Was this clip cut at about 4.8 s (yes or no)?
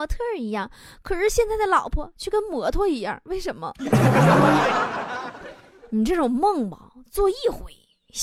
no